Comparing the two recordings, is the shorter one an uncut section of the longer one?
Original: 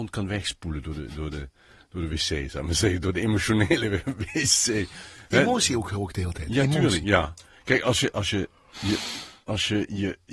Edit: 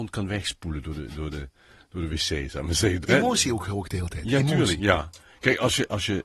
no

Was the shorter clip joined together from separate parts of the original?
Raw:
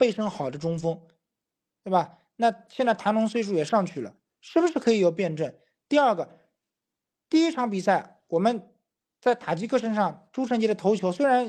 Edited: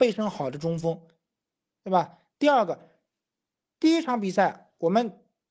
yes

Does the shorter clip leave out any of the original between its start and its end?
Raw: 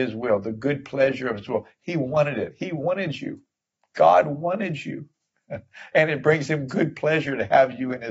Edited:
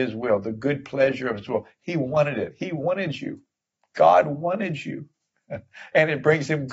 no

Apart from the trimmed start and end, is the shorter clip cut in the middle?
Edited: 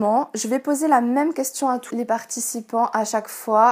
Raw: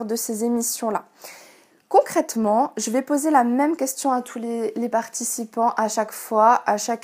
yes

